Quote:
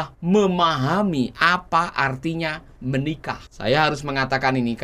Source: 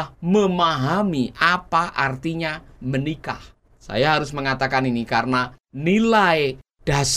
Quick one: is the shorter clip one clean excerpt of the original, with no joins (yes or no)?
no